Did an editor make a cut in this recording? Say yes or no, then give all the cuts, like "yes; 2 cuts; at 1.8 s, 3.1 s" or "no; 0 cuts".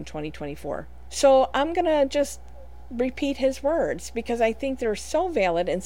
yes; 1 cut; at 1.1 s